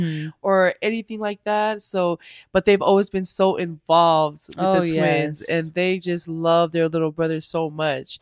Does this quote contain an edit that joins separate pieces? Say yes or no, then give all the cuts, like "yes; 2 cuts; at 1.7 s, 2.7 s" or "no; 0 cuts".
no; 0 cuts